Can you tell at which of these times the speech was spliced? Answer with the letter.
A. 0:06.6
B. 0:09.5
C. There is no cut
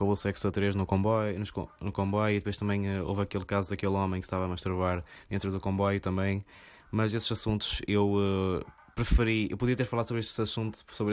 C